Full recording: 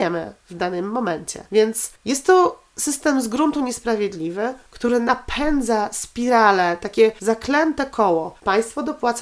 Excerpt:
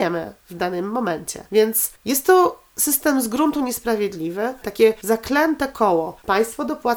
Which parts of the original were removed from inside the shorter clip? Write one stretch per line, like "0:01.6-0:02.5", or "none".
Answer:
0:04.6-0:06.8